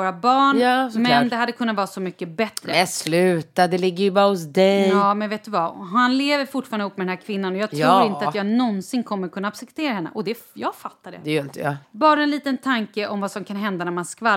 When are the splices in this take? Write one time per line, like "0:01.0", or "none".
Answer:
0:11.8